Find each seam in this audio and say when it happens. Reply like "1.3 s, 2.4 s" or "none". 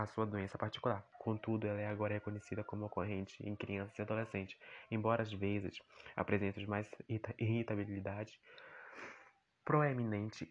1.1 s